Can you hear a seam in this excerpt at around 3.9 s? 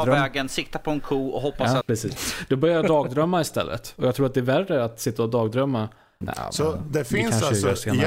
no; 2 cuts; at 1.8 s, 6.2 s

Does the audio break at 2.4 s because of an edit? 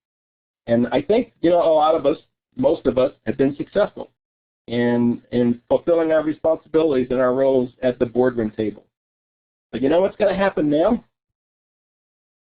yes; 1 cut; at 2.4 s

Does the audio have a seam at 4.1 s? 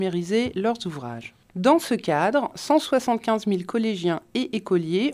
no; 2 cuts; at 1.4 s, 2.5 s

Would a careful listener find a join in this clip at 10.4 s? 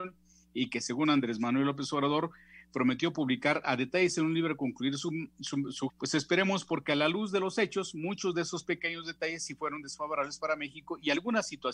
no; 1 cut; at 5.9 s

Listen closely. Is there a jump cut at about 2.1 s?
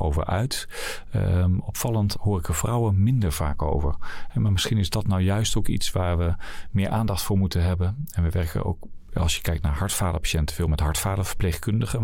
yes; 1 cut; at 2.1 s

